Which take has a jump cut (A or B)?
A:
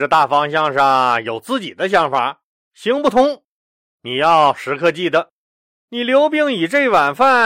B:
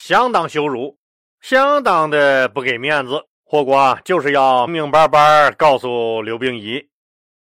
B